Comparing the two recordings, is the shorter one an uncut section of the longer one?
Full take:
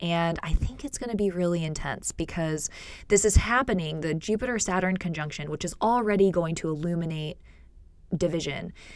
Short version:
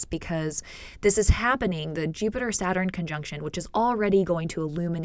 yes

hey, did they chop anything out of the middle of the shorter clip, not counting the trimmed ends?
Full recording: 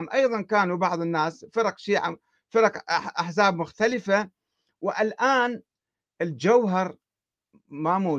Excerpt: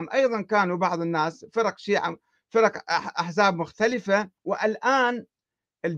yes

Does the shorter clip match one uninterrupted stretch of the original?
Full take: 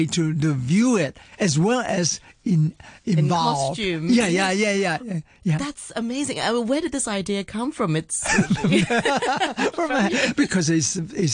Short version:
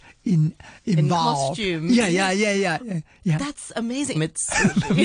no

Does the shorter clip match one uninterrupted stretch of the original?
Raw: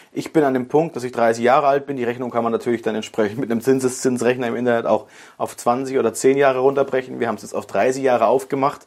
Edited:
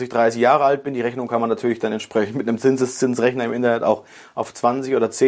yes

